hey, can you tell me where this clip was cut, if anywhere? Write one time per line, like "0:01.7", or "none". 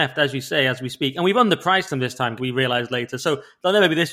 0:02.4